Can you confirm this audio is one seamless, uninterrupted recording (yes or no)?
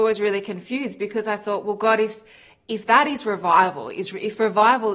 yes